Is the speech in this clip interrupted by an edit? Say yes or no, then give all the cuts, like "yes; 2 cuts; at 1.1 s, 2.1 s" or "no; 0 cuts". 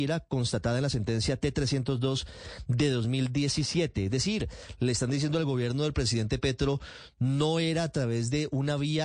no; 0 cuts